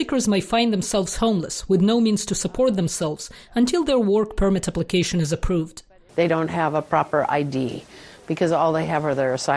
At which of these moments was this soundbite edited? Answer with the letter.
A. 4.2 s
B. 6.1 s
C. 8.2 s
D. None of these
B